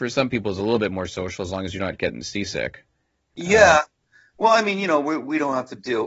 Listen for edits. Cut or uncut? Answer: uncut